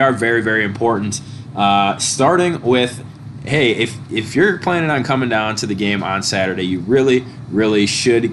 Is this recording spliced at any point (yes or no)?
no